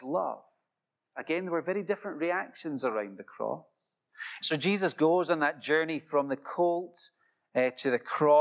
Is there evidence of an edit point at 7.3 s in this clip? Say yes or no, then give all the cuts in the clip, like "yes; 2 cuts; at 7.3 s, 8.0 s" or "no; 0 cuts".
no; 2 cuts; at 1.0 s, 4.4 s